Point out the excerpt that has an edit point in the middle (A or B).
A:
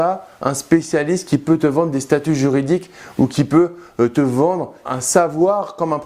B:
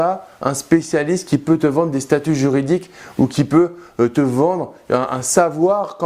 A